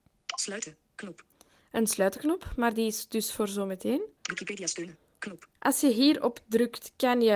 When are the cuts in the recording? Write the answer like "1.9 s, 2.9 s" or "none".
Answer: 4.2 s, 5.5 s